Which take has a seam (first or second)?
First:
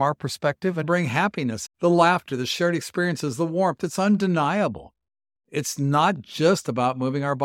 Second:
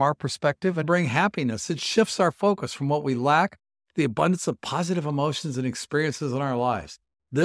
first